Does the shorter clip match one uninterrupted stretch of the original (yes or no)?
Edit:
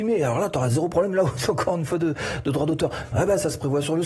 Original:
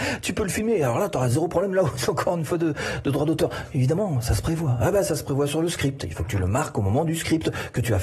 no